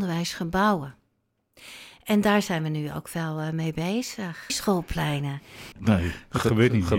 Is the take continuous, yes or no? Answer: no